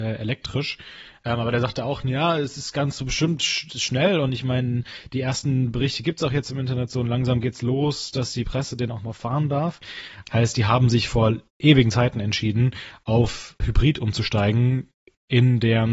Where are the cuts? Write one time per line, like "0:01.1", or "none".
0:10.2
0:13.6